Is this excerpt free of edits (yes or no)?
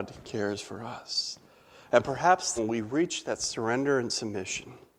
no